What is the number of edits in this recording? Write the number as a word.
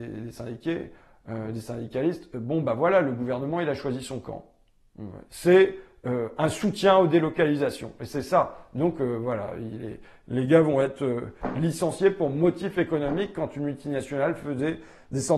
one